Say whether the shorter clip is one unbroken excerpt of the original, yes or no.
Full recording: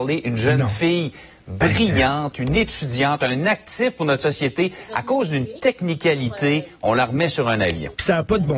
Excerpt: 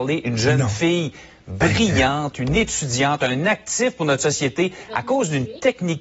yes